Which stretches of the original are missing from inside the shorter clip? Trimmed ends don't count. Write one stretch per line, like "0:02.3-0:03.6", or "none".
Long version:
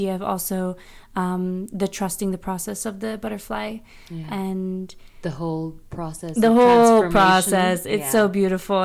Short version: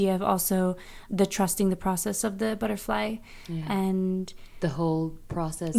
0:01.1-0:01.7